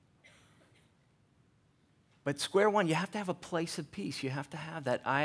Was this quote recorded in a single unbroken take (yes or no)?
yes